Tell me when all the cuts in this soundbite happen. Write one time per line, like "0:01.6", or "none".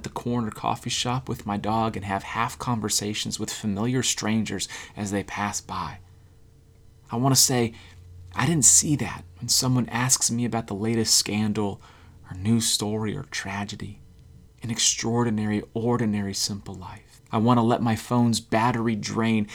0:14.5
0:17.2